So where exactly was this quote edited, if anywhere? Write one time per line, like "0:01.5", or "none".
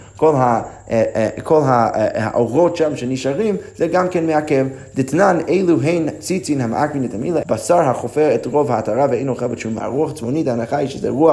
0:07.4
0:09.8